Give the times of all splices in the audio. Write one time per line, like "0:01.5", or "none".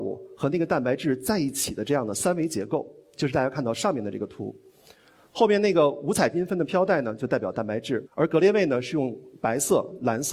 none